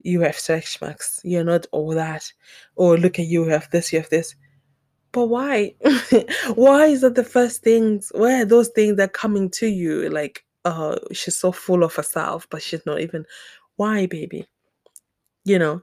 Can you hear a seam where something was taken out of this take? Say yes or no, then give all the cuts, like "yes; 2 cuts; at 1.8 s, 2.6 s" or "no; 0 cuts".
no; 0 cuts